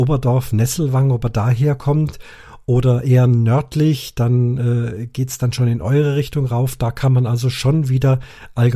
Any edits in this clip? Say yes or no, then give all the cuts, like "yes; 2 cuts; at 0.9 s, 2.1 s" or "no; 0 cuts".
no; 0 cuts